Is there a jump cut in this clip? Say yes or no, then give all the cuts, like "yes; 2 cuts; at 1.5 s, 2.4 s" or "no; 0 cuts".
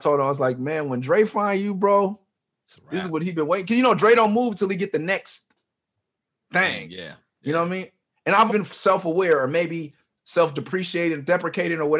yes; 1 cut; at 8.5 s